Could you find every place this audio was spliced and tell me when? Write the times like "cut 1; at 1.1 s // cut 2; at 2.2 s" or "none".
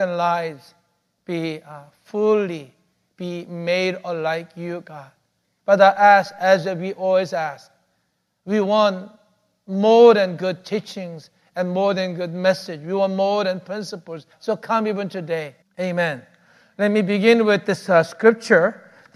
cut 1; at 5.4 s // cut 2; at 14.3 s // cut 3; at 15.6 s